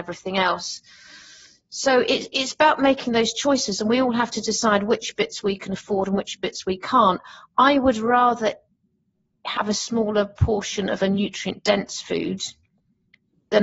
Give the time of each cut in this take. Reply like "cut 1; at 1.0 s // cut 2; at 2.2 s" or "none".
none